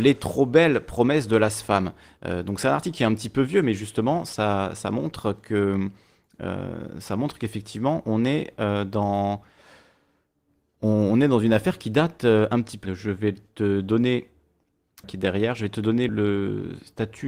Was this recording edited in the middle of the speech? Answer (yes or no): yes